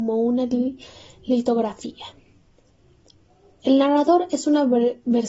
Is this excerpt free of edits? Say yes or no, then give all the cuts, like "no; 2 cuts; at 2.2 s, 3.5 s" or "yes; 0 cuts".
yes; 0 cuts